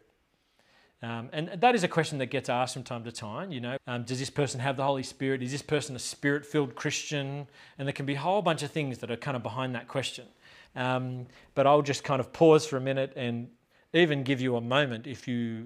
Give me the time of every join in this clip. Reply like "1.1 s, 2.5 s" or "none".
3.8 s, 10.7 s